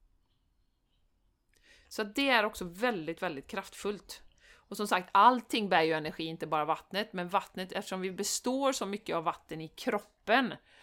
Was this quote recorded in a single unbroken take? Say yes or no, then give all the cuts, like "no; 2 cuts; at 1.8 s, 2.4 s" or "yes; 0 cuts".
yes; 0 cuts